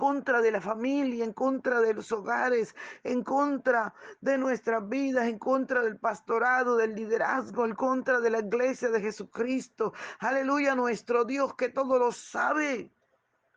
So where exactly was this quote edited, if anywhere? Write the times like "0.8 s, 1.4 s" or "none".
none